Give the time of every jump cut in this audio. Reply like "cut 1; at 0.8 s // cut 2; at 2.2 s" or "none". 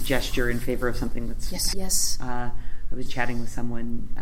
cut 1; at 1.7 s // cut 2; at 3.1 s